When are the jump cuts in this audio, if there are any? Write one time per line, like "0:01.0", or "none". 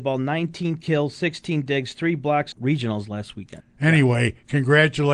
0:02.5
0:03.6